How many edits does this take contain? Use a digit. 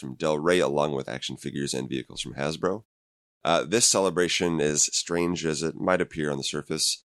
1